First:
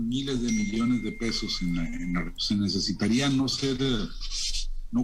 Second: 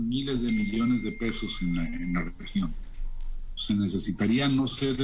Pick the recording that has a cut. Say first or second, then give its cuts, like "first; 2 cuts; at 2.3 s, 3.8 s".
first; 1 cut; at 2.4 s